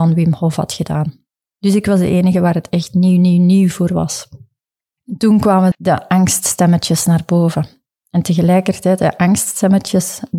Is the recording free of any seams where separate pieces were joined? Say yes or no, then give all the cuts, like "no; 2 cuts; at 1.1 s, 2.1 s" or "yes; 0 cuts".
no; 1 cut; at 5.7 s